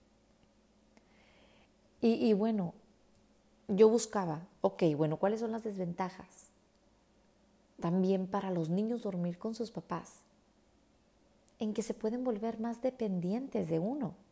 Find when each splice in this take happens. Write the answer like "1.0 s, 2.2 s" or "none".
none